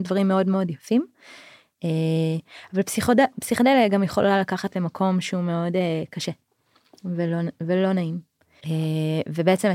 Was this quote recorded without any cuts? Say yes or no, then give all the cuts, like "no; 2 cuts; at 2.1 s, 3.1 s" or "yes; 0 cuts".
no; 1 cut; at 8.6 s